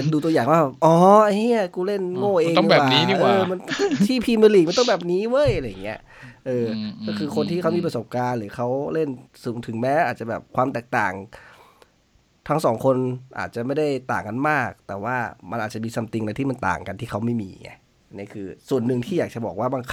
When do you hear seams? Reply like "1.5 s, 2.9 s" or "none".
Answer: none